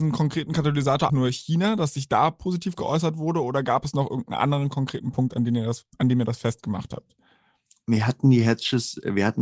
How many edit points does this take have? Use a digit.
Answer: 1